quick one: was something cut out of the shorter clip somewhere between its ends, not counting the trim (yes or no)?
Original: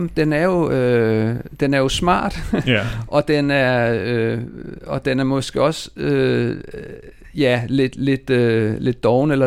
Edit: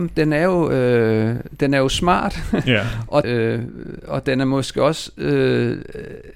yes